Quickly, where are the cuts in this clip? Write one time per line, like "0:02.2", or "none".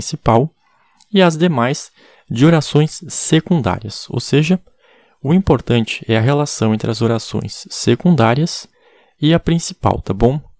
none

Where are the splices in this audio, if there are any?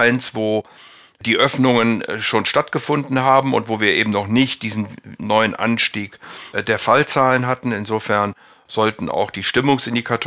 none

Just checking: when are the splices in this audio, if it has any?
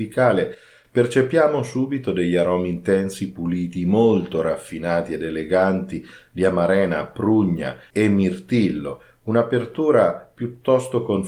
none

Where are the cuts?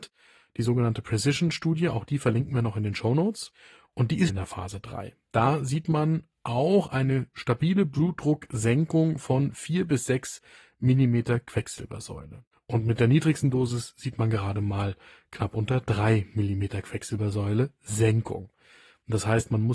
0:04.3
0:12.5

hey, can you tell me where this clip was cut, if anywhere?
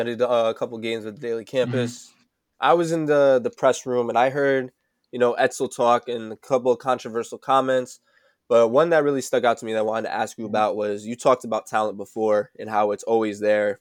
none

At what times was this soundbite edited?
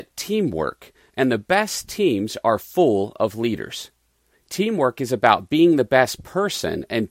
0:04.3

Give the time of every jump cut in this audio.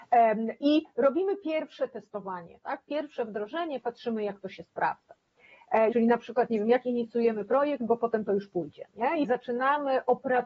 0:05.9
0:09.2

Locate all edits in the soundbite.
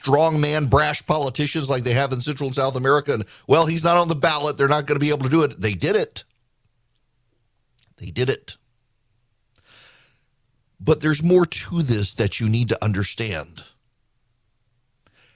none

